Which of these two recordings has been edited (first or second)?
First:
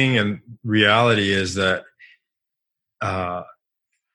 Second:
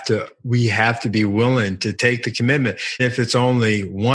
second